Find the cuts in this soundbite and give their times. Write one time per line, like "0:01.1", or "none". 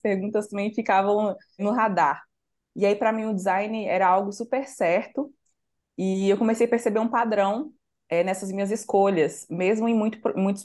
none